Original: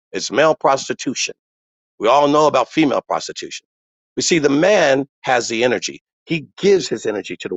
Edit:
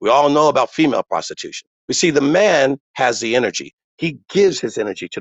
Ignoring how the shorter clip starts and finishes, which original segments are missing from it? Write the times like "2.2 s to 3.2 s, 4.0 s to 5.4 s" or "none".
3.7 s to 4.0 s

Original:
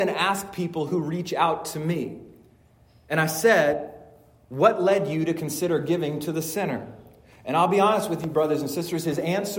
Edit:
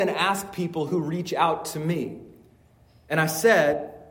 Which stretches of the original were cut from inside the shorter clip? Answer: none

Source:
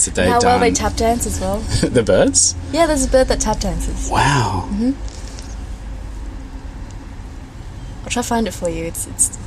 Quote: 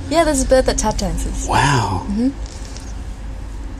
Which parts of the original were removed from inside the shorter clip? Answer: none

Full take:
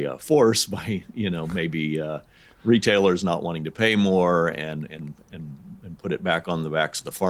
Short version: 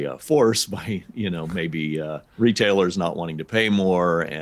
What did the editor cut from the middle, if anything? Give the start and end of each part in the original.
2.3 s to 2.5 s

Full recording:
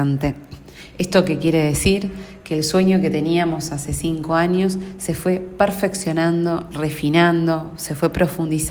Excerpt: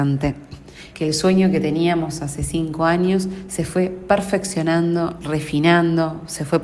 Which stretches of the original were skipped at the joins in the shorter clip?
0.9 s to 2.4 s

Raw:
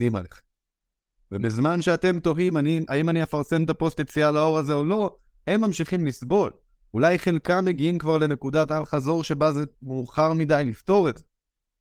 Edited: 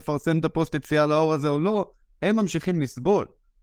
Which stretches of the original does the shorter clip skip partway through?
none

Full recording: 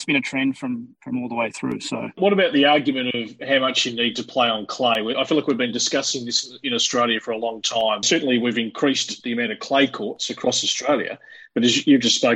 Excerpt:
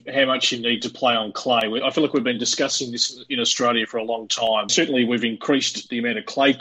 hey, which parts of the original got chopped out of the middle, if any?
none

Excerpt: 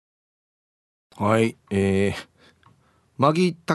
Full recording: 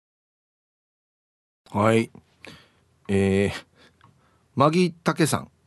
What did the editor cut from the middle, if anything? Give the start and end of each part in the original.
2.1 s to 3.0 s

